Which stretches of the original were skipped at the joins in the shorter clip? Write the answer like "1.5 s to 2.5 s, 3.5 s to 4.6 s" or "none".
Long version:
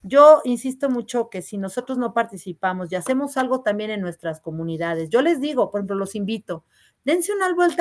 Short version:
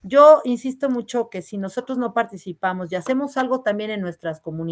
none

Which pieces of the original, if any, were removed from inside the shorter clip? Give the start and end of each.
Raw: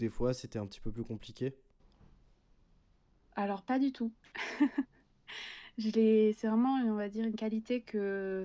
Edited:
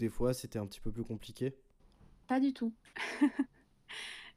2.2 s to 3.6 s

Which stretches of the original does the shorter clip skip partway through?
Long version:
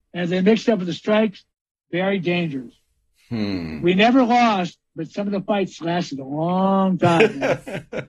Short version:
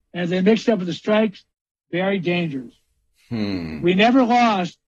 none

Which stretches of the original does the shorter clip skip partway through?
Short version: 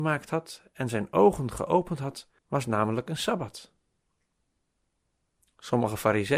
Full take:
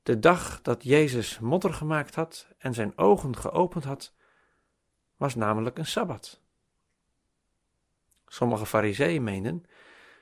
4.2 s to 5.1 s

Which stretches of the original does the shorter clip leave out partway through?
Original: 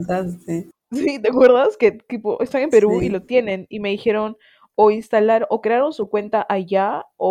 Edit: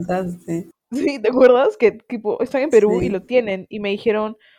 none

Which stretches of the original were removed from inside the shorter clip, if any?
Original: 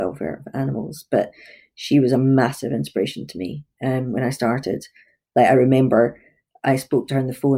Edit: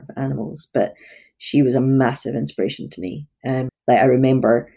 4.1 s to 5.2 s

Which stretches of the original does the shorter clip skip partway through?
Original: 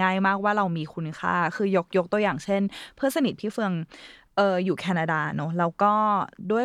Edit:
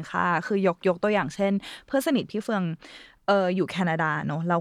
none

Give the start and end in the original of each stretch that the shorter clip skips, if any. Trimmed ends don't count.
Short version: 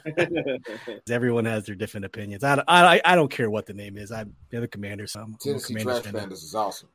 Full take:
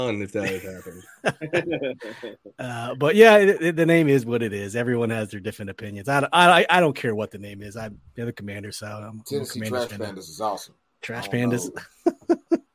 2.4 s to 4.7 s, 8.8 s to 9.0 s

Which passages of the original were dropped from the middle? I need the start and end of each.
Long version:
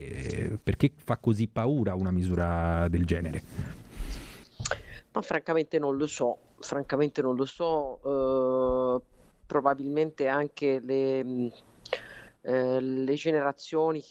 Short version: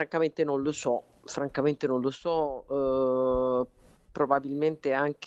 none

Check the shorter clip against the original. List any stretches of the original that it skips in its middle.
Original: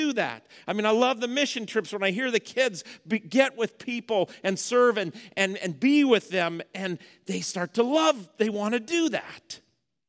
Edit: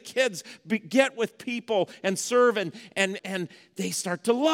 5.6 s to 6.7 s

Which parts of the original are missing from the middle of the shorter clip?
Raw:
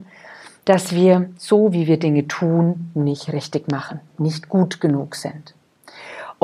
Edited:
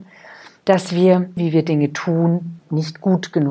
1.4 s to 1.7 s, 2.9 s to 4.1 s

